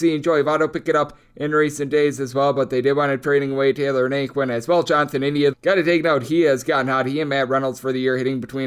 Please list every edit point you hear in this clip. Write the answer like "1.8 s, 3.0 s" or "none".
5.5 s

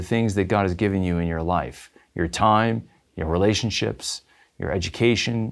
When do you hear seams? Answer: 3.1 s

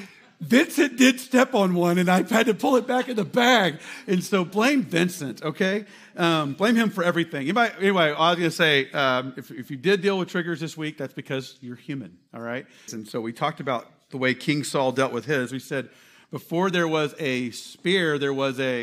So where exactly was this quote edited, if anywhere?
12.9 s

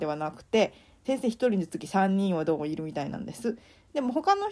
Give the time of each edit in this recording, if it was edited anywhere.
1.0 s

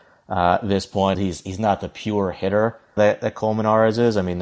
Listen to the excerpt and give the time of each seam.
1.1 s, 3.0 s

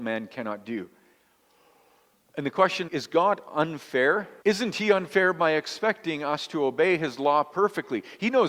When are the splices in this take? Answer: 2.9 s, 4.4 s

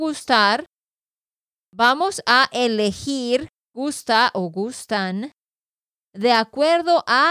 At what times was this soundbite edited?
none

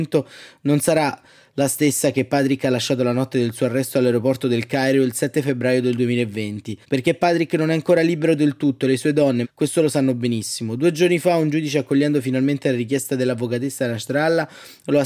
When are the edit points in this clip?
6.8 s, 9.4 s

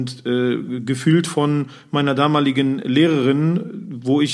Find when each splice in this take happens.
none

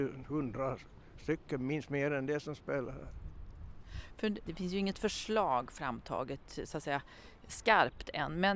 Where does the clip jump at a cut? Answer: 4.4 s

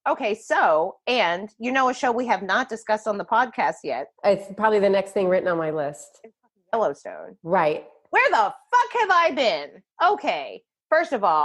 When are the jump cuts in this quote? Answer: 9.9 s

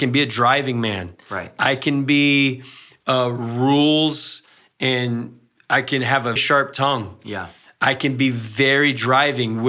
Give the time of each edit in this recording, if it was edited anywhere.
6.4 s

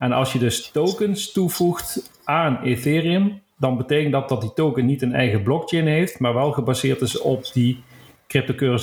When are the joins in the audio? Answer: none

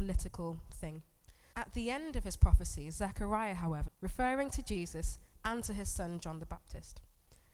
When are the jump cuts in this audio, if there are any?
1.5 s, 3.9 s

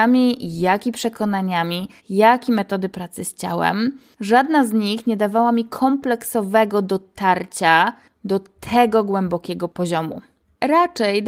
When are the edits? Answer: 2.0 s

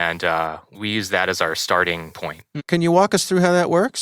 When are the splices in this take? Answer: 2.6 s

